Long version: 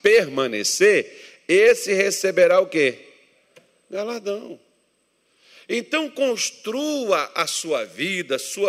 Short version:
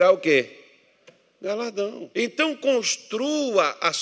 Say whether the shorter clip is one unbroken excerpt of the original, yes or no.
no